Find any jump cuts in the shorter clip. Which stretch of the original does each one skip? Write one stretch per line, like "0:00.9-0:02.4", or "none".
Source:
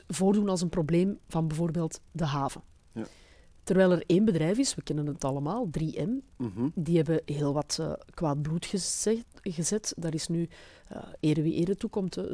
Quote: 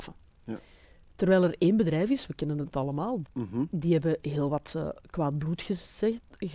0:05.7-0:06.3